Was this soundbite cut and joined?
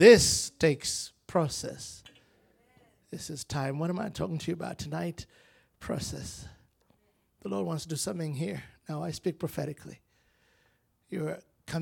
no; 0 cuts

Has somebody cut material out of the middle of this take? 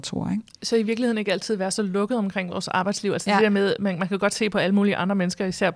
no; 0 cuts

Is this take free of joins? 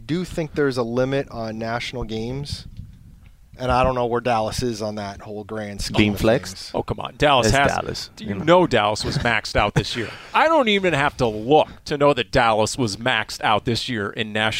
yes; 0 cuts

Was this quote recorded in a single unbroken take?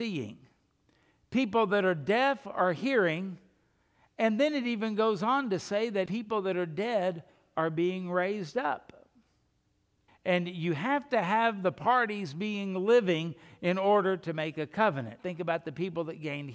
no; 3 cuts; at 6.1 s, 10.1 s, 15.2 s

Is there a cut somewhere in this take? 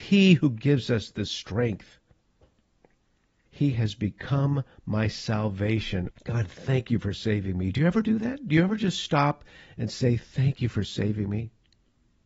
yes; 2 cuts; at 3.4 s, 6.1 s

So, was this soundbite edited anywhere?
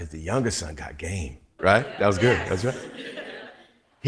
yes; 1 cut; at 1.6 s

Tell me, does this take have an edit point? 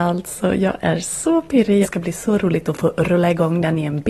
yes; 1 cut; at 1.8 s

